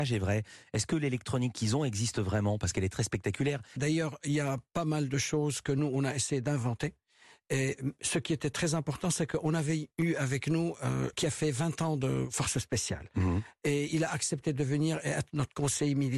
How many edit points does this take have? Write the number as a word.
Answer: two